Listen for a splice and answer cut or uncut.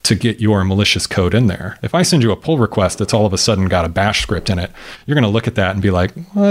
uncut